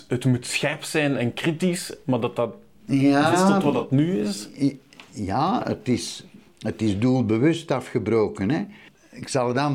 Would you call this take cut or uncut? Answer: cut